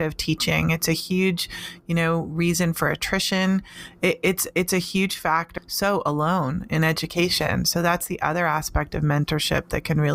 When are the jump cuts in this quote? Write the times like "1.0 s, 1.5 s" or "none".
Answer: 5.6 s